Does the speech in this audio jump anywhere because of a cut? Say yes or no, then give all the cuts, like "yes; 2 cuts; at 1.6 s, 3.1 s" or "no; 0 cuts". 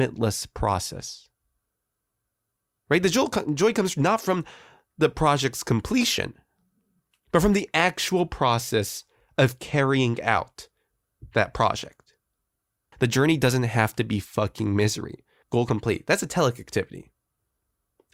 yes; 2 cuts; at 12.9 s, 15.4 s